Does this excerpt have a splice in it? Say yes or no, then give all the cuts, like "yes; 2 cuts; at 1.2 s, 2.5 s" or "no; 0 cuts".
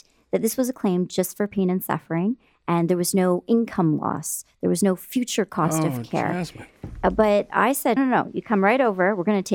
yes; 1 cut; at 8.0 s